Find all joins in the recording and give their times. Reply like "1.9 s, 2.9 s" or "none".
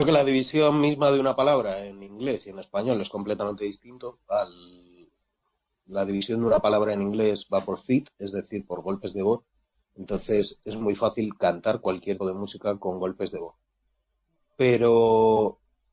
12.2 s